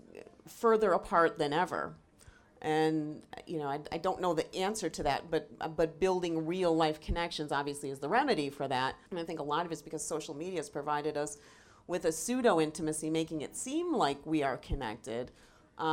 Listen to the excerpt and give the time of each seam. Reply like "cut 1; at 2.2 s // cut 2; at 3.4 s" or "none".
cut 1; at 9.1 s

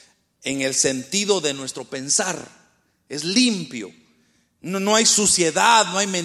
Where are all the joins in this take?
none

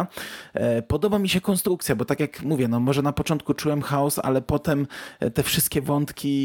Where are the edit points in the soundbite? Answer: none

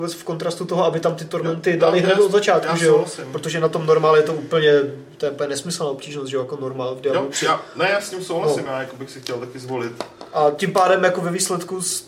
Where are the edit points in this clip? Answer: none

